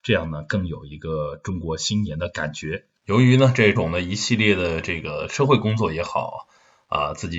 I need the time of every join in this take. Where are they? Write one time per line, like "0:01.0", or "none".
0:03.8